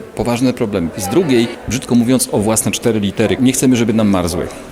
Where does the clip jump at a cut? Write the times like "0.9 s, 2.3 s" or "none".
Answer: 0.9 s, 3.4 s